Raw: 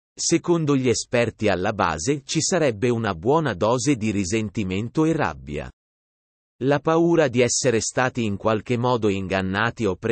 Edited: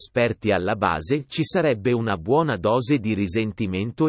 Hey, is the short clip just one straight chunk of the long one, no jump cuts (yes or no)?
yes